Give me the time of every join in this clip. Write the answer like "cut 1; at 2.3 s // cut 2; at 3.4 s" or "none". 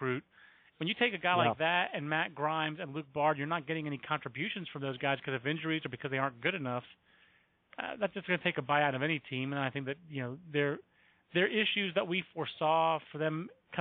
none